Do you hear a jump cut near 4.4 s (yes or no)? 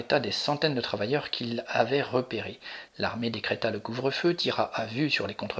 no